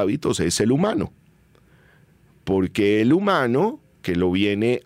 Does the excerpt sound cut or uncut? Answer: uncut